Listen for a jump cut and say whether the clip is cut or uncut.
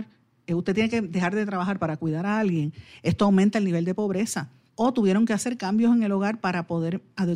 cut